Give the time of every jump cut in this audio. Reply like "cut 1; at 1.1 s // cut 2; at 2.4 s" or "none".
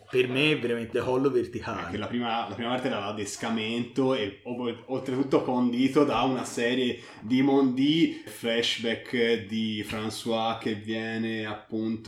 cut 1; at 0.9 s // cut 2; at 8.3 s